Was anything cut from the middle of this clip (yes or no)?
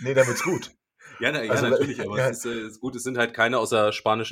no